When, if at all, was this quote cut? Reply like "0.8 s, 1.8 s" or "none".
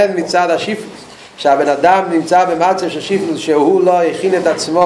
none